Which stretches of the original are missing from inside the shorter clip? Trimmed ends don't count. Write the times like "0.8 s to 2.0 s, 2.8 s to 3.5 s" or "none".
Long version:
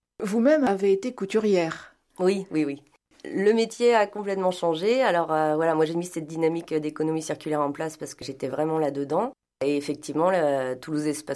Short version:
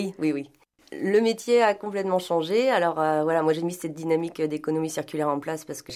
none